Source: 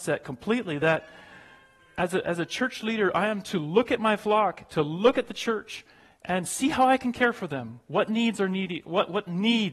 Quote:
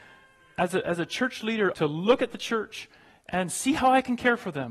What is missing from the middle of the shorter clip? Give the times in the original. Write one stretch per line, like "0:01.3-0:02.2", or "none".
0:03.1-0:04.7